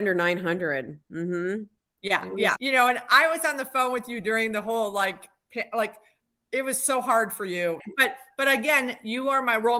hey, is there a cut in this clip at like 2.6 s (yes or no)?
yes